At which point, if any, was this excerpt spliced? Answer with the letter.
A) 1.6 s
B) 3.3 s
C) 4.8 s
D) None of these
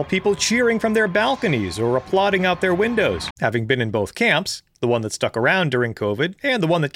B